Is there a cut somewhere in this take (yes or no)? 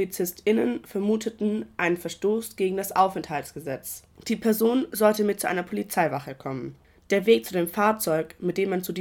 no